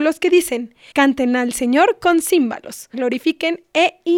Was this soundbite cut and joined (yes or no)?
yes